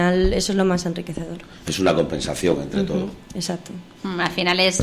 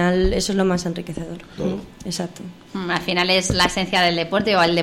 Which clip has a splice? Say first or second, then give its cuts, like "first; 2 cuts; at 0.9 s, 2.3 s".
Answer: second; 1 cut; at 1.6 s